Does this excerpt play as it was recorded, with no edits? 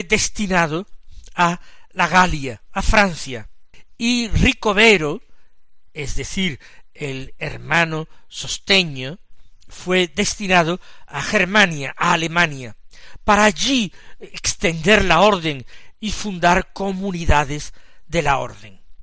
yes; 0 cuts

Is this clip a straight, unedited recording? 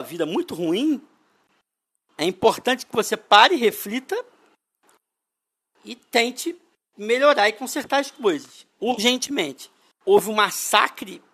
no; 1 cut; at 9.9 s

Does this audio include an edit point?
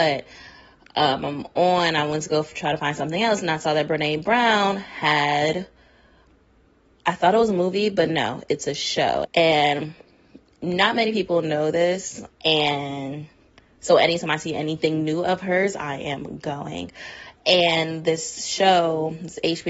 yes; 2 cuts; at 9.2 s, 12.3 s

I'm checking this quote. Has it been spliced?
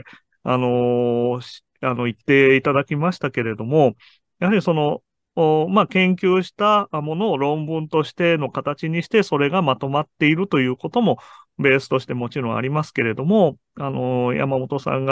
no; 0 cuts

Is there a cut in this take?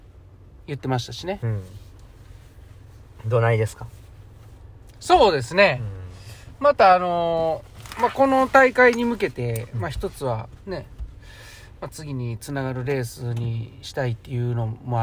yes; 1 cut; at 1.4 s

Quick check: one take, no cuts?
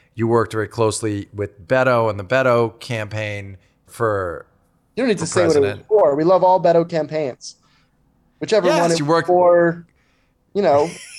yes; 0 cuts

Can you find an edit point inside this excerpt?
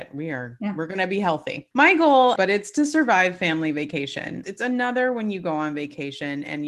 yes; 2 cuts; at 2.4 s, 4.4 s

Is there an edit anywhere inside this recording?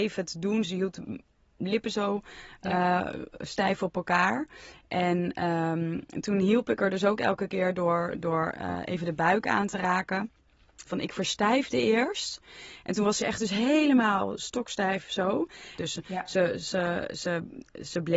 yes; 2 cuts; at 10.9 s, 15.8 s

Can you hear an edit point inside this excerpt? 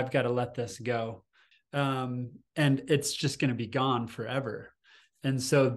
yes; 1 cut; at 1.5 s

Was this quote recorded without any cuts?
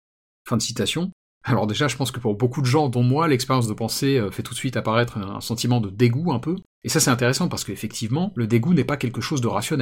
yes; 0 cuts

